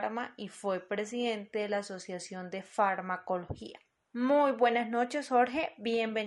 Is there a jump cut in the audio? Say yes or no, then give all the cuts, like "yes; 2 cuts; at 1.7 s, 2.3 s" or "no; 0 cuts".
no; 0 cuts